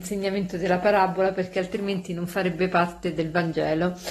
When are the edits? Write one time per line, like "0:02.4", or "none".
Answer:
0:03.2

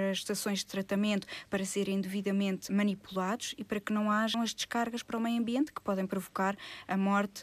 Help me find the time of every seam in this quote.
0:02.7
0:04.3

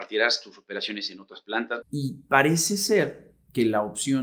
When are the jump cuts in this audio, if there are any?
0:01.8

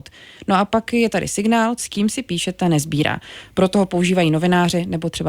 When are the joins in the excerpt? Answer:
0:01.8

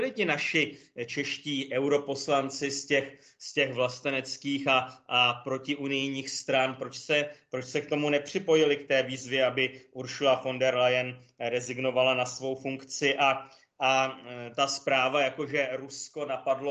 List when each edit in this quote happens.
none

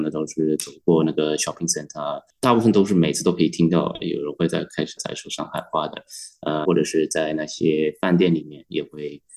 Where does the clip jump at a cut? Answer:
0:05.0
0:06.6

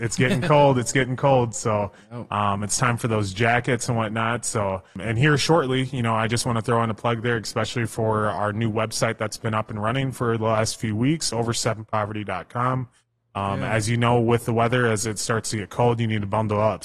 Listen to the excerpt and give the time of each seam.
none

